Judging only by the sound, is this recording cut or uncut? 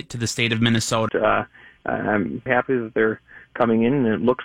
cut